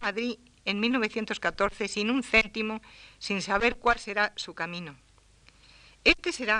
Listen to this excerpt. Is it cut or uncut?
uncut